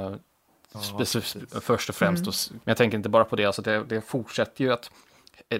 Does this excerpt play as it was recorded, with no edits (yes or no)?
no